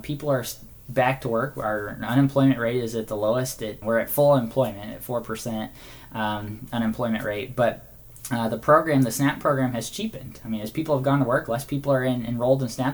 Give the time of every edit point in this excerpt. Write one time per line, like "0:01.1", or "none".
0:03.8